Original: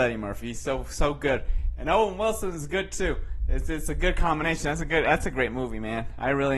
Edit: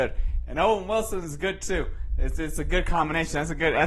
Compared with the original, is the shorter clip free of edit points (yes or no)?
yes